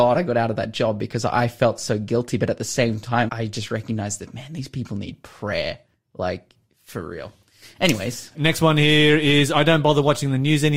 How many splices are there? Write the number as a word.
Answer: two